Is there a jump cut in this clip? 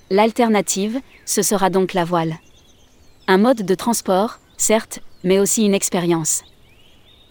no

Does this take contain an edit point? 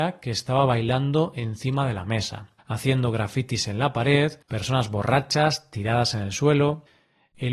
yes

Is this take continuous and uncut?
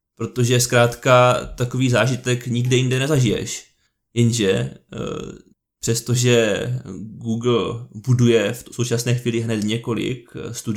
yes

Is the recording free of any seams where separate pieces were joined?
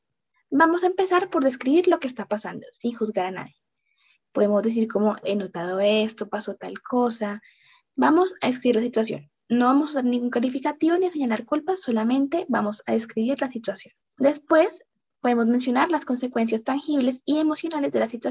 no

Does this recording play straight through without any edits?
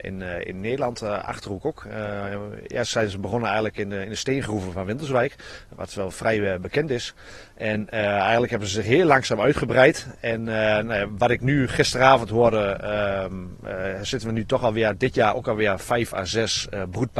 yes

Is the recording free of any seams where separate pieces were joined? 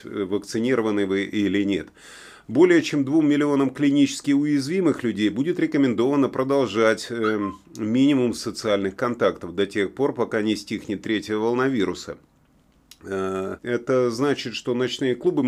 no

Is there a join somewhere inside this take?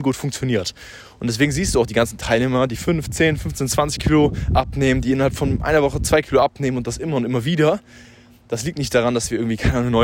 no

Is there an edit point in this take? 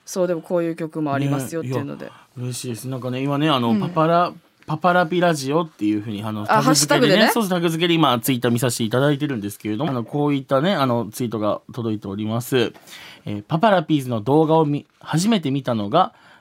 yes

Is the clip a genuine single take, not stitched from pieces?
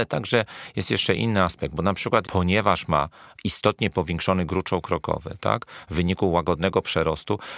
no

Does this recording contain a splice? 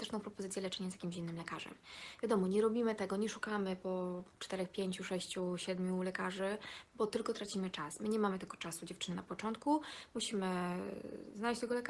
no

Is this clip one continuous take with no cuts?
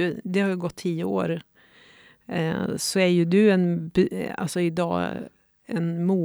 yes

